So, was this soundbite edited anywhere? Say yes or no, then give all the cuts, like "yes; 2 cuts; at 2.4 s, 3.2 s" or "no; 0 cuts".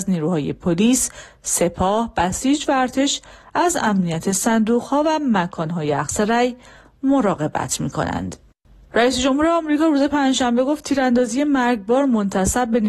no; 0 cuts